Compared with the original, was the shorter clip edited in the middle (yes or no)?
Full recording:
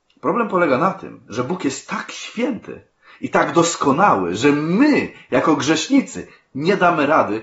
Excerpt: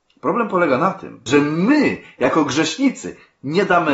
yes